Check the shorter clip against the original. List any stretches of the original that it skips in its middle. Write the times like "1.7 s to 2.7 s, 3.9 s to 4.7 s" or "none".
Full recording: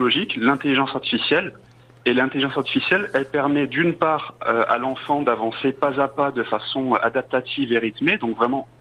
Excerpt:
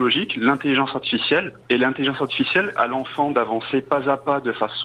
1.6 s to 2.0 s, 3.1 s to 4.7 s